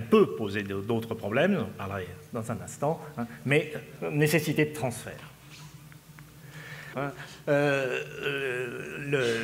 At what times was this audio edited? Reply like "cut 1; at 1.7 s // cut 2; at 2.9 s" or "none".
cut 1; at 6.9 s

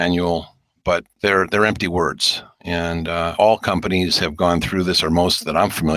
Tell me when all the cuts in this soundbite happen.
none

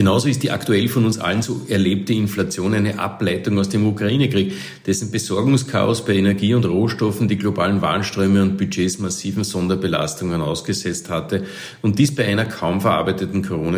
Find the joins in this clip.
none

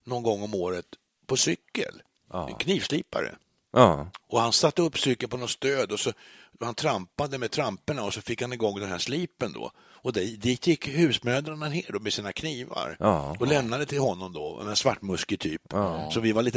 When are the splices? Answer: none

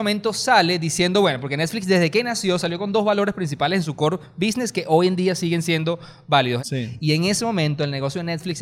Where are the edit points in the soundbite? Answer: cut 1; at 6.6 s

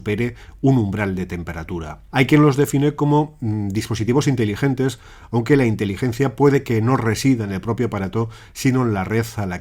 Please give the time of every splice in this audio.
cut 1; at 2.1 s

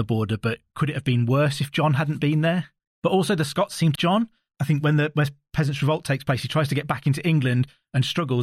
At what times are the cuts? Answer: cut 1; at 2.9 s // cut 2; at 4.0 s

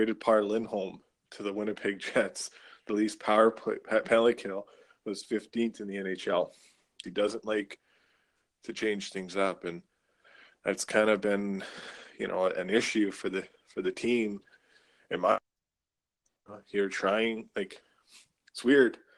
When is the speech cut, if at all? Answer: cut 1; at 7.0 s

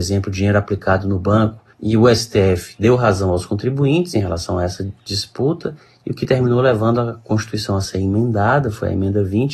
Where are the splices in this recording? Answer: cut 1; at 1.7 s

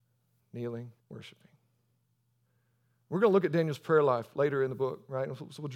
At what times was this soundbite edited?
cut 1; at 1.0 s

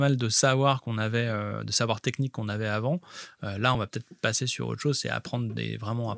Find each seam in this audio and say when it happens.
none

